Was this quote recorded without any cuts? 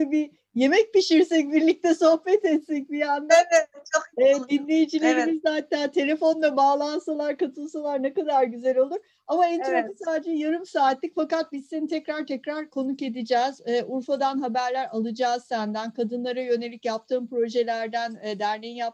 yes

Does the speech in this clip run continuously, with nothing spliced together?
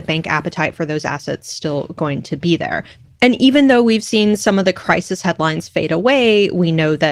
yes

